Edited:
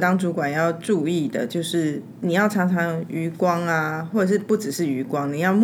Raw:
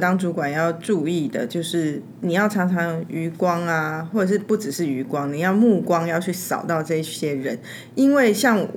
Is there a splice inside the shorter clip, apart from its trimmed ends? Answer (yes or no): no